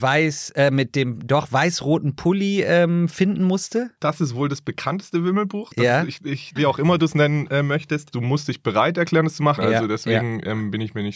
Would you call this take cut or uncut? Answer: cut